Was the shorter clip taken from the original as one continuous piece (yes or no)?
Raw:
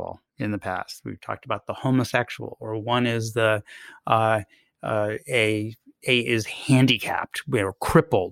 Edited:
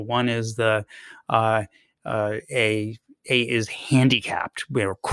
yes